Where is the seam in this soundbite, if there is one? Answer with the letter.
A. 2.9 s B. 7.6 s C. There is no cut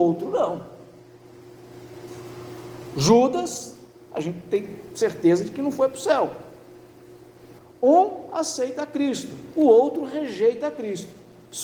B